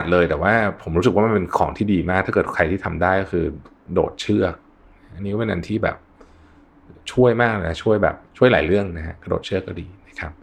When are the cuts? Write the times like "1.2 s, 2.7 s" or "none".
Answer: 8.3 s